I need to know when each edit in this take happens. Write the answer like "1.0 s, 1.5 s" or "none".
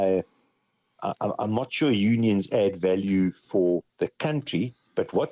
3.9 s